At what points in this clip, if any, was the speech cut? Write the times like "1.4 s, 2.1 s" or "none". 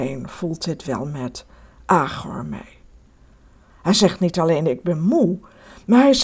3.7 s